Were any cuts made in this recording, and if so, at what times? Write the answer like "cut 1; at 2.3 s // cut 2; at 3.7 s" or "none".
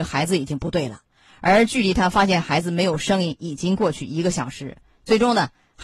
none